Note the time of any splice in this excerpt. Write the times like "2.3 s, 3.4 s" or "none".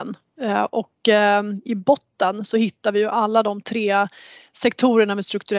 none